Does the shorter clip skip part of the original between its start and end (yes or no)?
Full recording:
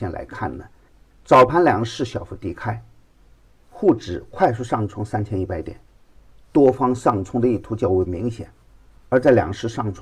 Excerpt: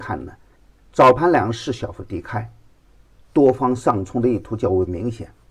yes